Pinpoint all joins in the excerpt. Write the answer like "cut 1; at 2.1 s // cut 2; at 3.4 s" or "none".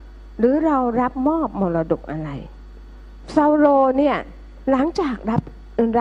none